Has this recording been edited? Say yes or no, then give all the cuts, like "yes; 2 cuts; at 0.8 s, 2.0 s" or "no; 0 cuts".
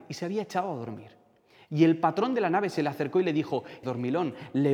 yes; 1 cut; at 3.8 s